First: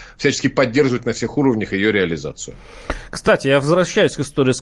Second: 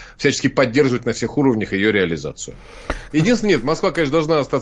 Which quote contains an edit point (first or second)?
second